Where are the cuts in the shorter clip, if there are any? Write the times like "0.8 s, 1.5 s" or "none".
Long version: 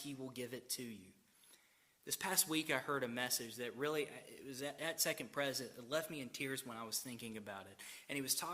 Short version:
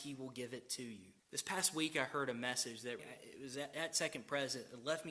1.2 s, 3.0 s